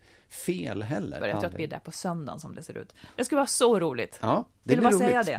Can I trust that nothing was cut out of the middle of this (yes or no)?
no